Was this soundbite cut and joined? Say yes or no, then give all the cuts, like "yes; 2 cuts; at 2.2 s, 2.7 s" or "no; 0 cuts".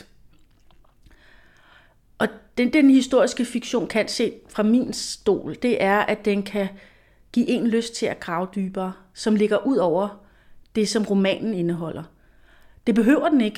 no; 0 cuts